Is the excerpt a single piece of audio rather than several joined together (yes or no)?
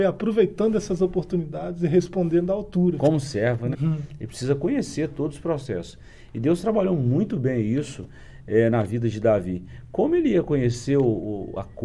no